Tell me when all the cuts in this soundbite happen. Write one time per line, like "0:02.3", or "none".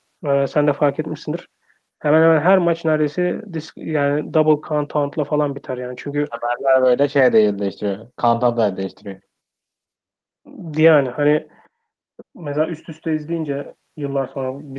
0:12.2